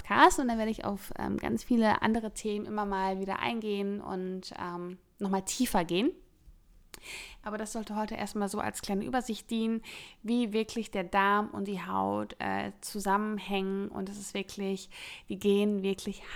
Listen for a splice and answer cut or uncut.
uncut